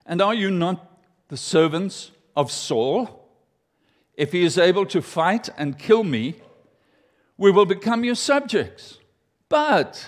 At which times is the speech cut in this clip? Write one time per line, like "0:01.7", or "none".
0:03.9